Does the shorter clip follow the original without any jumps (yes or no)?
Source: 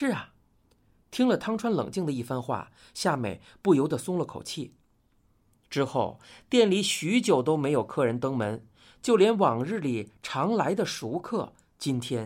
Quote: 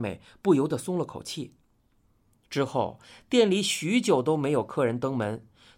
yes